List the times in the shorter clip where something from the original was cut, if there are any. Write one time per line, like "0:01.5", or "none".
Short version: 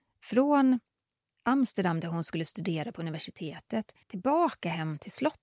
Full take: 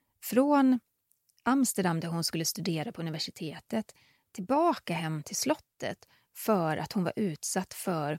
0:04.0